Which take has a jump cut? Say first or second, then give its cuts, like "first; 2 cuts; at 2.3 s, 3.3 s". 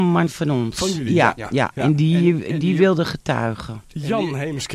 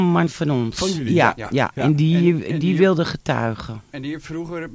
first; 1 cut; at 3.8 s